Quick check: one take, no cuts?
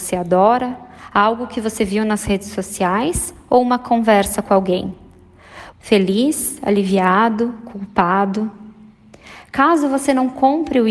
no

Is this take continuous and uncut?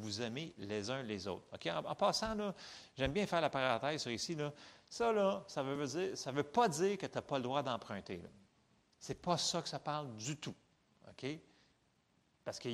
yes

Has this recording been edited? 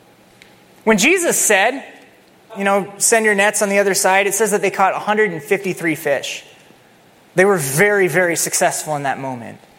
yes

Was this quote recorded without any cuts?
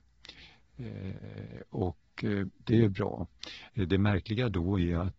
no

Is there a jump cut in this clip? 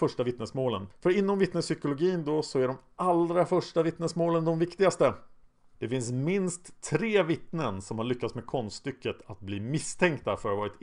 yes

